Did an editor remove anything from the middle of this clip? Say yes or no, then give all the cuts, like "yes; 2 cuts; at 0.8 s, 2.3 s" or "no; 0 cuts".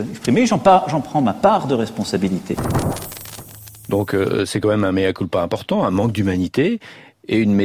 no; 0 cuts